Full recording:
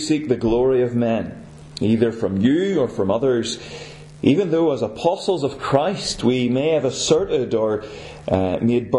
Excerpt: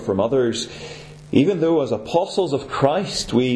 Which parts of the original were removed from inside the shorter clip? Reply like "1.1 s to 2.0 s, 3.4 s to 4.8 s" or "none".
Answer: none

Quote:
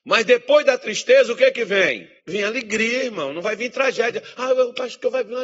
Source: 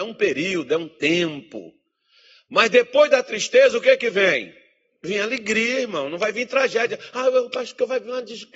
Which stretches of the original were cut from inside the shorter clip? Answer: 4.6 s to 4.9 s

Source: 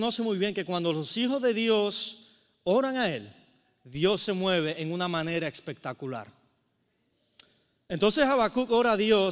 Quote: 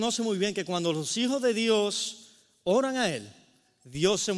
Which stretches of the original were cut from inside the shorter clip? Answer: none

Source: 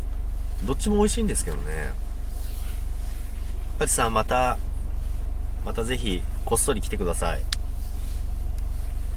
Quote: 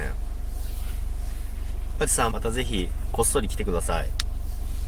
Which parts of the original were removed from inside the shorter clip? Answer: 4.1 s to 5.6 s

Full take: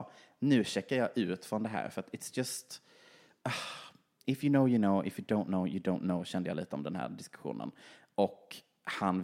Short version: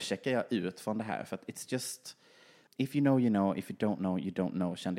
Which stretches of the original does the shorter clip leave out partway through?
3.3 s to 4.2 s

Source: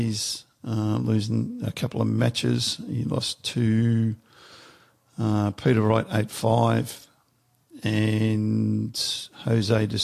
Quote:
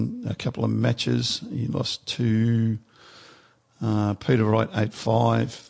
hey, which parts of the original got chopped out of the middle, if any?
none

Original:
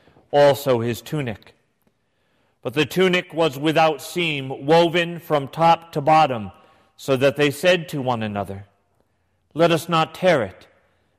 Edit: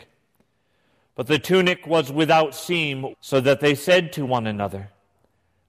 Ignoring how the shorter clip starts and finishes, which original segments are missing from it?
4.6 s to 6.9 s

